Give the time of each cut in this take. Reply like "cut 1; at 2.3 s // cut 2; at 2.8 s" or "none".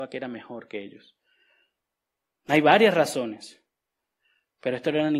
none